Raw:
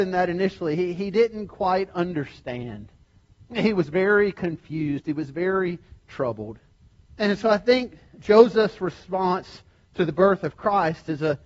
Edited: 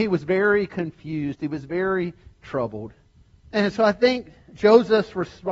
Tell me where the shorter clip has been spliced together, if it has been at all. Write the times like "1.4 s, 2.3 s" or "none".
none

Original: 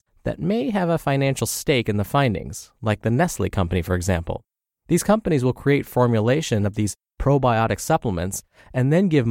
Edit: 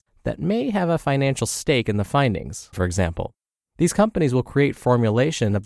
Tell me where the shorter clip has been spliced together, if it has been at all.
2.7 s

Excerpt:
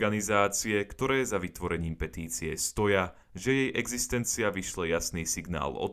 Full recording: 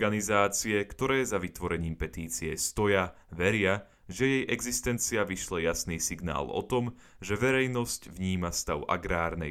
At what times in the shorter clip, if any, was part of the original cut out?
3.2 s

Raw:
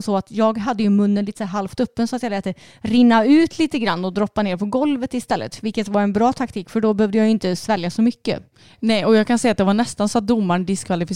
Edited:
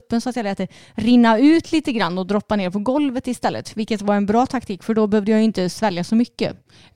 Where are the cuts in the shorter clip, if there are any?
none

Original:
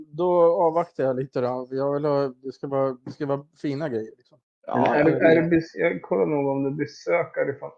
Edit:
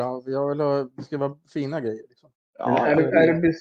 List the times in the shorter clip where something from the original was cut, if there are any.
0.9 s

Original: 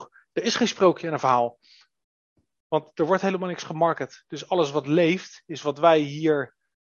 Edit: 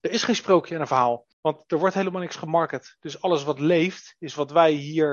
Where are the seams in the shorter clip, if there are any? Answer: 1.3 s

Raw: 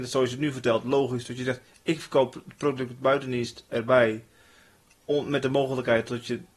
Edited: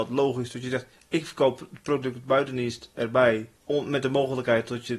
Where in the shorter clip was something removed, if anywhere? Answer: 3.6 s

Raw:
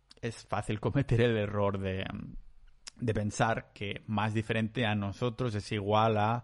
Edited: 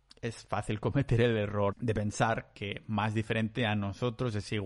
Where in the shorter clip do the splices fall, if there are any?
1.7 s

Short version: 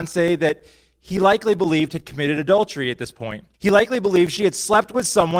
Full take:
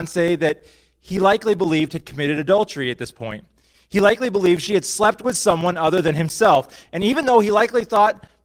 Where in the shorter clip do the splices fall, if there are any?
3.5 s

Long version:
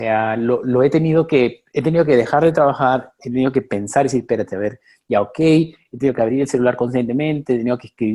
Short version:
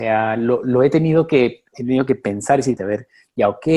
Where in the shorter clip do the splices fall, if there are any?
1.7 s, 2.8 s

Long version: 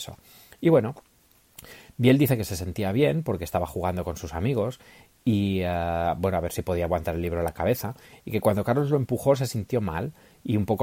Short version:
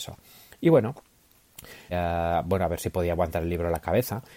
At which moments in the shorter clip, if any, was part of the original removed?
1.9 s

